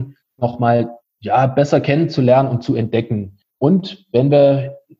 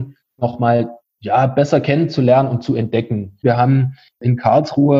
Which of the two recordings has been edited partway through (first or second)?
second